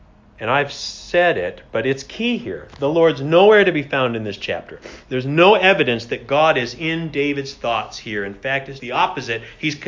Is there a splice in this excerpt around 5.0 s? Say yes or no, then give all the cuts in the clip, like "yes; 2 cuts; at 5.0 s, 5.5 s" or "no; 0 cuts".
no; 1 cut; at 8.8 s